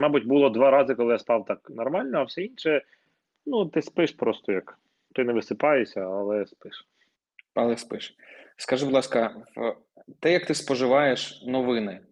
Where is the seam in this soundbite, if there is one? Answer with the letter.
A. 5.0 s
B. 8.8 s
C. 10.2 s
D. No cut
D